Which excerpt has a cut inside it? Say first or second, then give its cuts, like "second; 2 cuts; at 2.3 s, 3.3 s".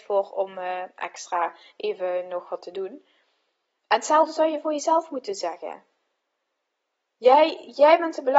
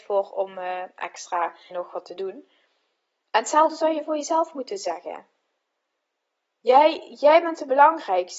second; 1 cut; at 1.7 s